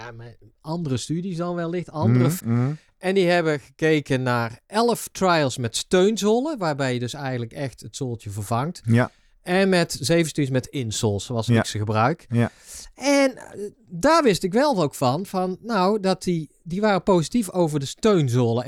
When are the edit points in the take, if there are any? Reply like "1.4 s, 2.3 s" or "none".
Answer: 2.4 s